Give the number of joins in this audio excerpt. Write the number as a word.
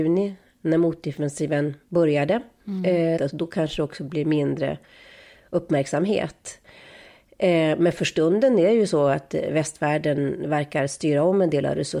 one